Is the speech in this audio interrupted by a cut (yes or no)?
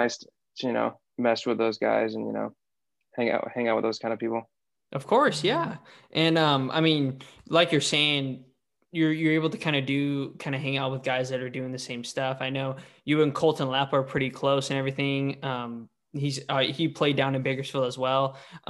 no